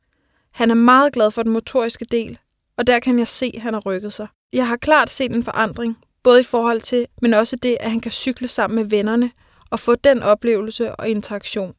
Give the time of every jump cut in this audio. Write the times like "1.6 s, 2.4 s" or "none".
7.1 s